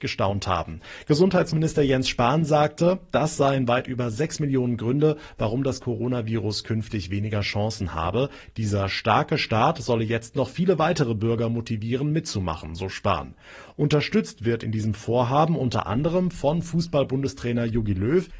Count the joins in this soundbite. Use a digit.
1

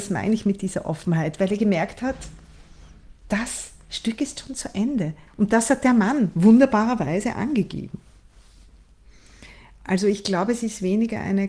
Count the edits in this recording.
1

